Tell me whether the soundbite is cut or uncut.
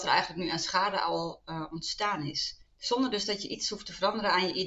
cut